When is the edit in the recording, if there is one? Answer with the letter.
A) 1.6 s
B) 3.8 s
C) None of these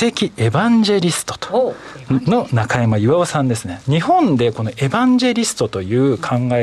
C